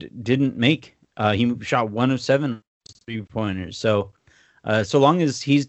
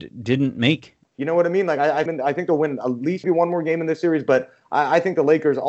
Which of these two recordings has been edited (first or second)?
second